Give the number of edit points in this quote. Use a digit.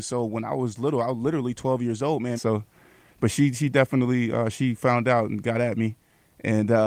1